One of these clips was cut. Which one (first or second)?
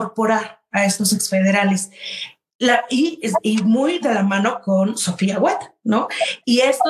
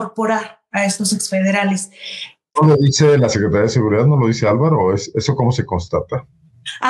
second